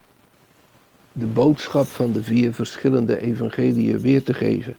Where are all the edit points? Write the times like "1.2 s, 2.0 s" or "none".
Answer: 1.0 s